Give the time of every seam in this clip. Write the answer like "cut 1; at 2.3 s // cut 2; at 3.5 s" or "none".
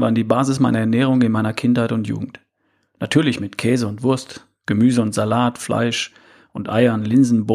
none